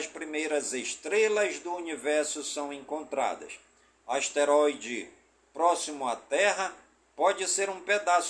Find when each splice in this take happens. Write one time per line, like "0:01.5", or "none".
none